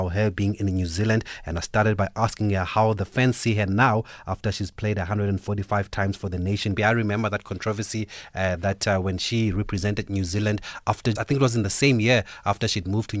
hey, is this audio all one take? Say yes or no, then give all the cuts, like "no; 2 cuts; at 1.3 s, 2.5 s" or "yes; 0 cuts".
no; 2 cuts; at 6.8 s, 11.2 s